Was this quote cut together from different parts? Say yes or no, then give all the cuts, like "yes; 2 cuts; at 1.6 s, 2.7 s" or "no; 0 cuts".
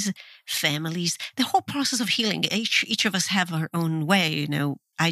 no; 0 cuts